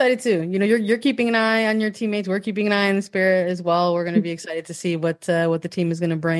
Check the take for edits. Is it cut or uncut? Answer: uncut